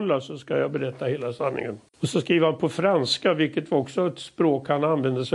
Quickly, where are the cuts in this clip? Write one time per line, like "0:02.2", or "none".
0:01.9